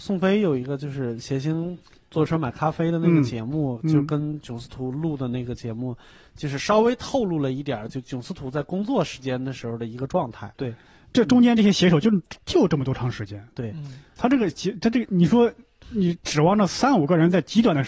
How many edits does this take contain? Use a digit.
1